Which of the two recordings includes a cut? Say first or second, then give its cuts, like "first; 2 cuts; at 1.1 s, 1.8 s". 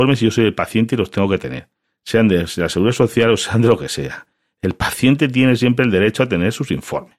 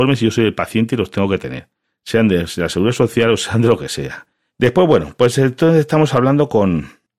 second; 1 cut; at 4.5 s